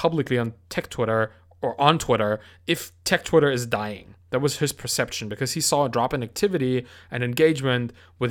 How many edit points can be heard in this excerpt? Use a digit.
0